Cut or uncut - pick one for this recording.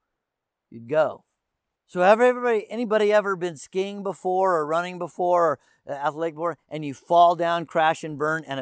cut